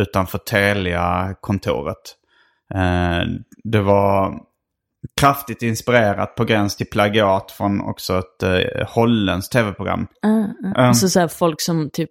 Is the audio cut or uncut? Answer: cut